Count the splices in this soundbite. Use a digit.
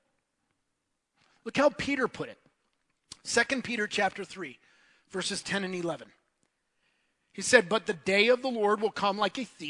0